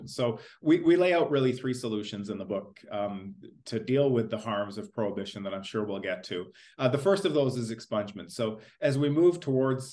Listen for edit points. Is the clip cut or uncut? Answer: uncut